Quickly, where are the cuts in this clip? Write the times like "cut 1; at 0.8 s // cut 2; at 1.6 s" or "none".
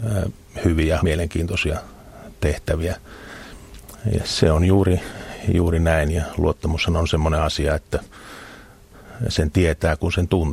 cut 1; at 1.0 s // cut 2; at 4.2 s